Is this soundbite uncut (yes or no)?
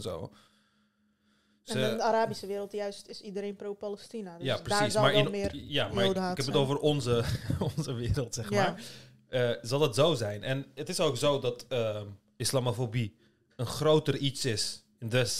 yes